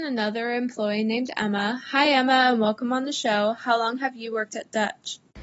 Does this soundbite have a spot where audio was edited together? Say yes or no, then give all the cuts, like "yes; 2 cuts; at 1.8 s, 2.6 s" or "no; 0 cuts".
no; 0 cuts